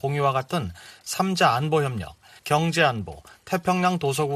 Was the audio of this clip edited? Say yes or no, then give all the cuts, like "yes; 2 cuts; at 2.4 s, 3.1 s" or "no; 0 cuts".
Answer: yes; 1 cut; at 2.4 s